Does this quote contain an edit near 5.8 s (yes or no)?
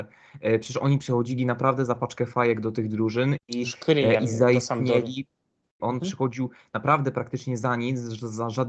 yes